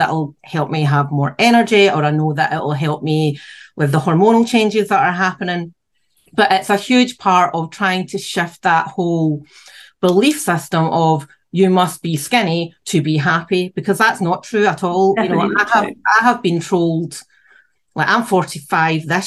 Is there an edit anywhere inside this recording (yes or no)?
no